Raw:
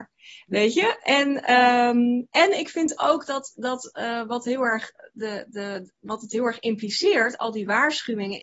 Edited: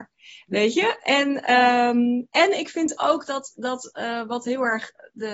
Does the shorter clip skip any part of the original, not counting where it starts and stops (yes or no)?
no